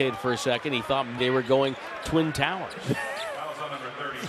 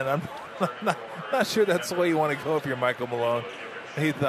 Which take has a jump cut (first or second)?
first